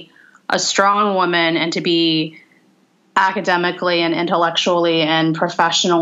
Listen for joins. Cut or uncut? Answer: uncut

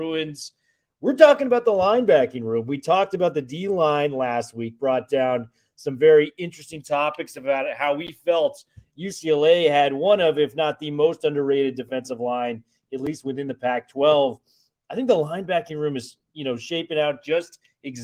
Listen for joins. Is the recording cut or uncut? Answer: uncut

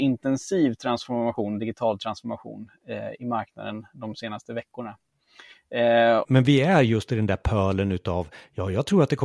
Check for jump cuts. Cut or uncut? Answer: cut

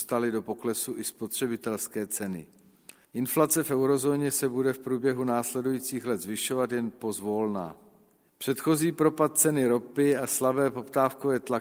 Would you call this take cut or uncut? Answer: cut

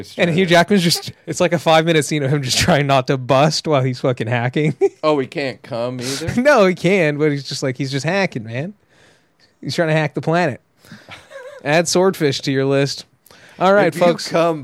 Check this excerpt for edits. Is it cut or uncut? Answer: uncut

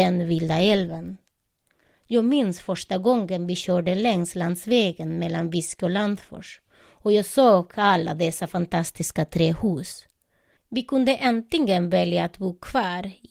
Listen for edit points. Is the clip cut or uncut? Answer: cut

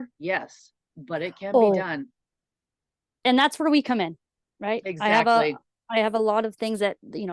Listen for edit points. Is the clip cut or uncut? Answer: uncut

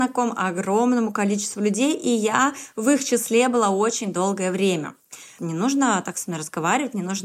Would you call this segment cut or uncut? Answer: cut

